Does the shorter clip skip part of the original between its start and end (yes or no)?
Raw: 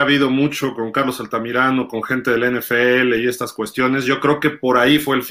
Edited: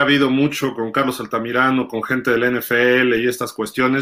no